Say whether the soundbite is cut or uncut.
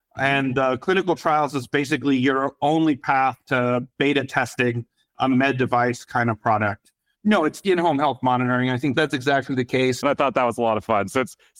cut